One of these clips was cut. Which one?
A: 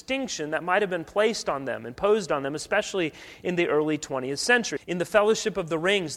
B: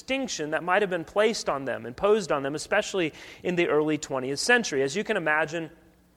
A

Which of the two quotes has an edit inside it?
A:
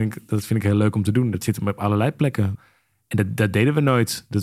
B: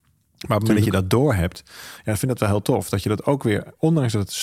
A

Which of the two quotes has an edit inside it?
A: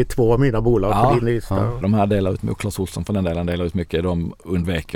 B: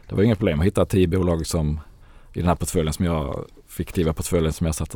A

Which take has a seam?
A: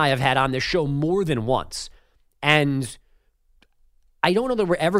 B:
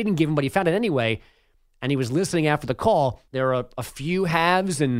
B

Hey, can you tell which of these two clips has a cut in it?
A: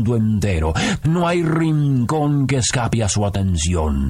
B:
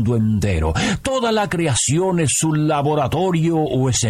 A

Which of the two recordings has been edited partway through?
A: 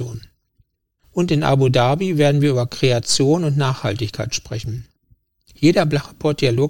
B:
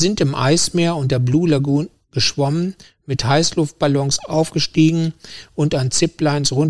A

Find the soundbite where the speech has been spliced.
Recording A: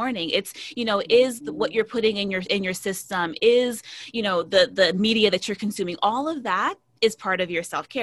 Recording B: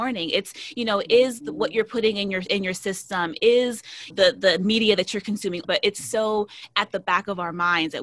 B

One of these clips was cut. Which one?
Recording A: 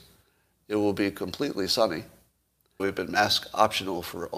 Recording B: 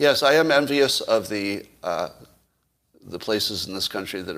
A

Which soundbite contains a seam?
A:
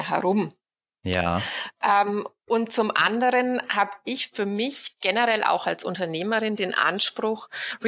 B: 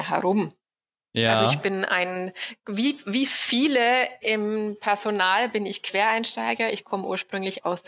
B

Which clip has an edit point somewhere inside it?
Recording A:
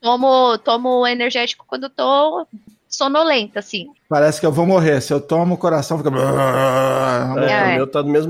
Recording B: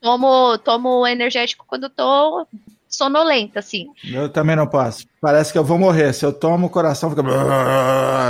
A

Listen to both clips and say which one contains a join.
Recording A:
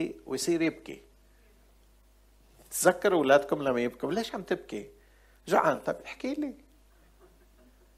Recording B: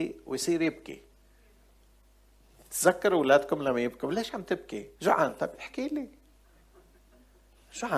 B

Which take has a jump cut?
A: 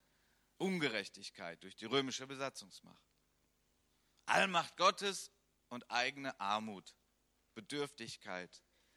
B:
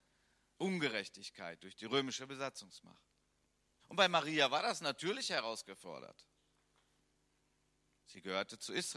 B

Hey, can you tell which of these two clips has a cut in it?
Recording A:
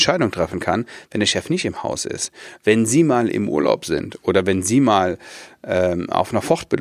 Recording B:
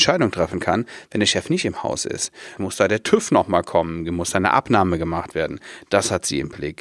B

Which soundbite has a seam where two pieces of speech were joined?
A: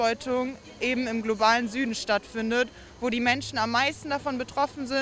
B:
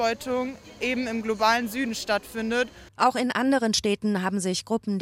B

